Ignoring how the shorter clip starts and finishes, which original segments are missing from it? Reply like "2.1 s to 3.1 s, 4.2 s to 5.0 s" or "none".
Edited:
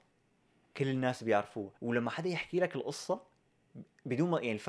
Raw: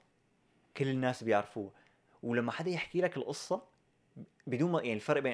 1.8 s to 2.2 s